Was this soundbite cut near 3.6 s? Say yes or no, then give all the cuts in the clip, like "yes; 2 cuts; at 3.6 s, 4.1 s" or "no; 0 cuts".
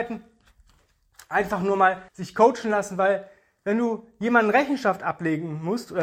no; 1 cut; at 2.1 s